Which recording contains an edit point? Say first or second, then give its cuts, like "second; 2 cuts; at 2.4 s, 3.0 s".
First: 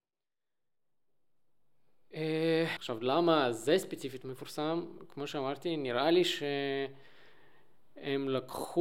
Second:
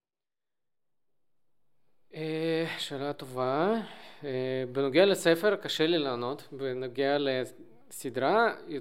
first; 1 cut; at 2.8 s